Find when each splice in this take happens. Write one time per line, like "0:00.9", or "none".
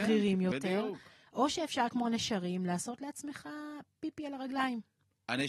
none